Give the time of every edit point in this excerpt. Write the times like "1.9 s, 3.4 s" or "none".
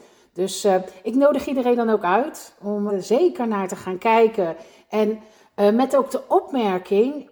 2.9 s